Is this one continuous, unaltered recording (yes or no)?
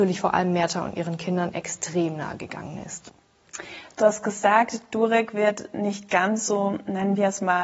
yes